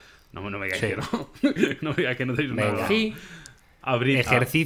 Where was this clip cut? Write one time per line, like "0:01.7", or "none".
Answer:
none